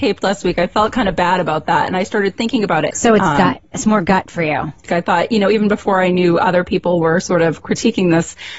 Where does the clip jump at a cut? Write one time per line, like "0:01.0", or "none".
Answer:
0:02.9
0:04.9